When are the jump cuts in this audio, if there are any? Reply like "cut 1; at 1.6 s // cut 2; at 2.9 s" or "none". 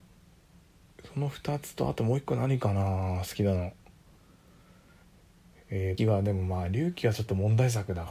cut 1; at 6.0 s

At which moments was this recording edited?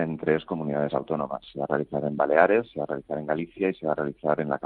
none

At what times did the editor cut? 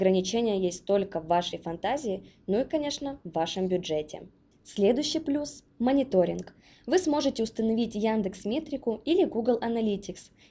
none

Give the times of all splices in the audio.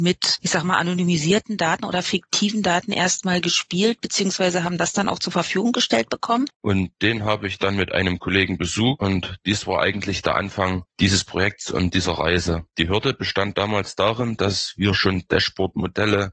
cut 1; at 6.5 s

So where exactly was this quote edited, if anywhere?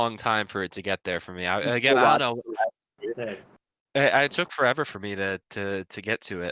cut 1; at 4.3 s

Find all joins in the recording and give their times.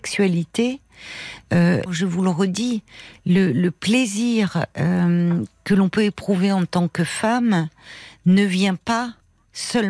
cut 1; at 1.9 s

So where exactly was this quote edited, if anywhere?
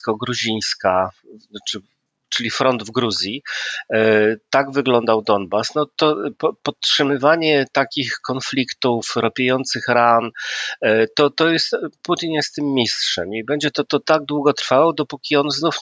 none

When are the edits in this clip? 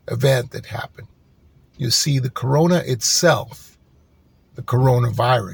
none

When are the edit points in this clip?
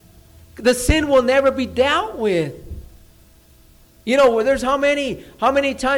none

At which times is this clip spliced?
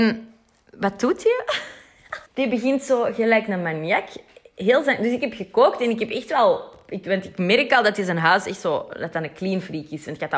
cut 1; at 2.3 s

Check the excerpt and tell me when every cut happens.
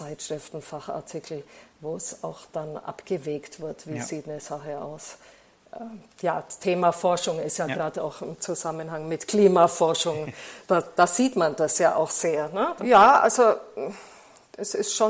cut 1; at 12.8 s

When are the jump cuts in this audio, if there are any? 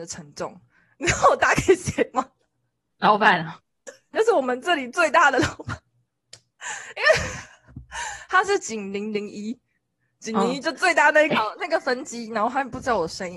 cut 1; at 4.1 s // cut 2; at 11.3 s

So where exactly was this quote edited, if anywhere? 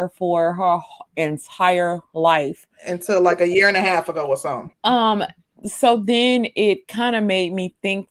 cut 1; at 4.7 s

